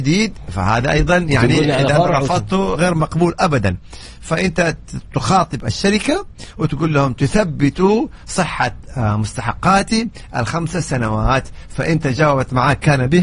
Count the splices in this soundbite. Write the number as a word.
one